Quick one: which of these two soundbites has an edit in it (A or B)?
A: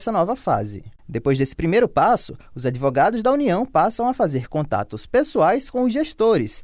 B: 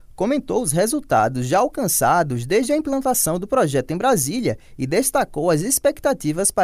A